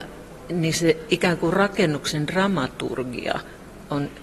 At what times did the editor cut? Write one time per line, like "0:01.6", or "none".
none